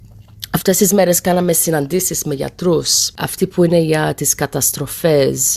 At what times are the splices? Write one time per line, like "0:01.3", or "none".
none